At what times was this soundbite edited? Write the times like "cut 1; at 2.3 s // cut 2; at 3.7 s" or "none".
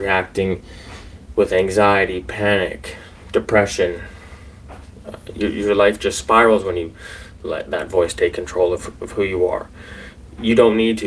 none